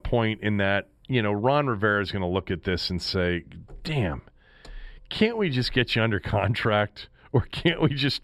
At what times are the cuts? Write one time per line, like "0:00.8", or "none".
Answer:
none